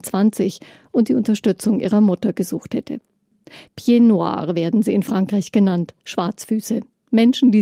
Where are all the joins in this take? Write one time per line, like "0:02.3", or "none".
0:03.7